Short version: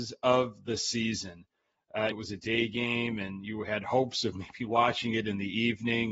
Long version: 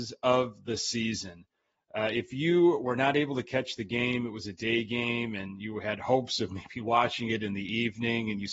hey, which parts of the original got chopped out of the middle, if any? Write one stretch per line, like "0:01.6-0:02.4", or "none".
0:02.1-0:04.3